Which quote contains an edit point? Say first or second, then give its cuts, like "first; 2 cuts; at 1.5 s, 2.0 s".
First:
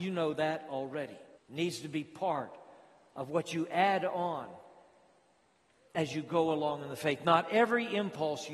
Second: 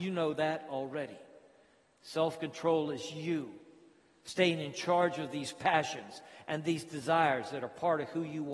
first; 1 cut; at 1.3 s